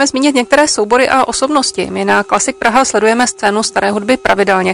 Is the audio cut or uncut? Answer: uncut